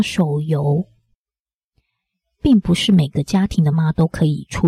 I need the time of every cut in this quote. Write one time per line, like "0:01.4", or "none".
0:03.7

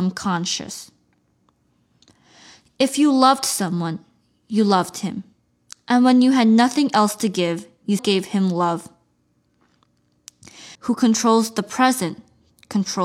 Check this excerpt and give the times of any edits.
0:08.0
0:10.7

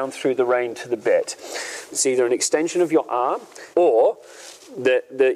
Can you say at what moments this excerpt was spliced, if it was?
0:01.9
0:03.7

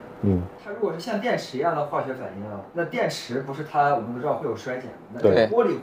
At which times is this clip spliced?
0:02.7

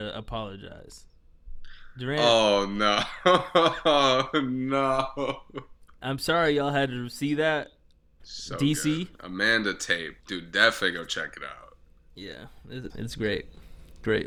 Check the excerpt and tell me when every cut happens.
0:08.2
0:10.2
0:12.9

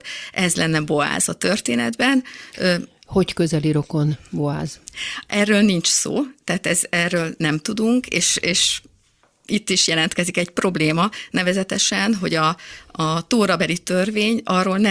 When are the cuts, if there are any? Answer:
none

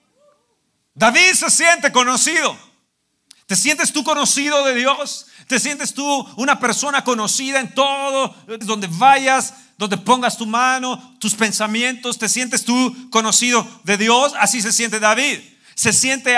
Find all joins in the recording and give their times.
0:08.6

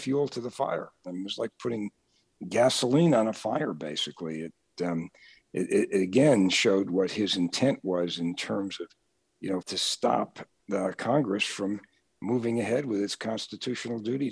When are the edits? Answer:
0:09.6

